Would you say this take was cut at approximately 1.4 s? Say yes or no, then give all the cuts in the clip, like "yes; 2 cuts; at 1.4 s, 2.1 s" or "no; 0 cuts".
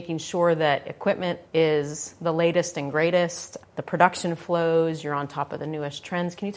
yes; 2 cuts; at 1.4 s, 3.6 s